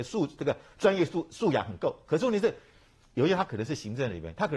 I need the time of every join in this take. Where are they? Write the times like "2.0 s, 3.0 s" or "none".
none